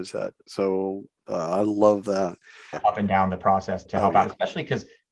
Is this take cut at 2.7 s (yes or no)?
yes